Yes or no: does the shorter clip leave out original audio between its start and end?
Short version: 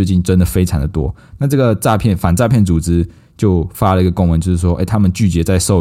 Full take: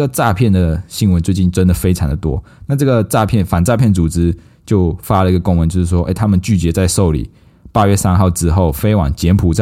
no